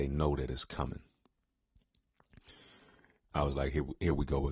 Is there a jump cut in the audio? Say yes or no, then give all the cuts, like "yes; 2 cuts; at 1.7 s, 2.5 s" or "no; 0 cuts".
yes; 1 cut; at 3.3 s